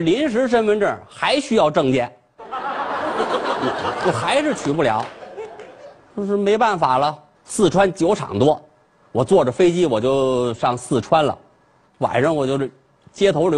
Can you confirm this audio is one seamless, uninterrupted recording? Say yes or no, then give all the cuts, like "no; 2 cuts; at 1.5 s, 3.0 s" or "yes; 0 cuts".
no; 2 cuts; at 7.3 s, 11.8 s